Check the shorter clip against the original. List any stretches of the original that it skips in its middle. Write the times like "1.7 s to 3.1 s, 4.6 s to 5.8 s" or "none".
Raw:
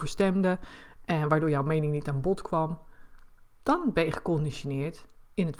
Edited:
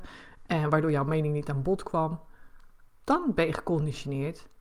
none